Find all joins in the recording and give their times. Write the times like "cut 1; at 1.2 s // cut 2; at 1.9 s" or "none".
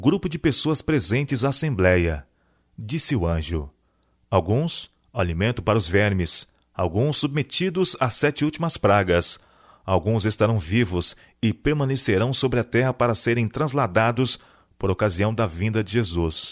none